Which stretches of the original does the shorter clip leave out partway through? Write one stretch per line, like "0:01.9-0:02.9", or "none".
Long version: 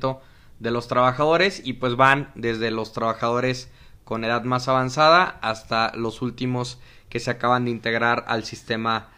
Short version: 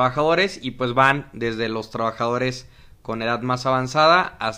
none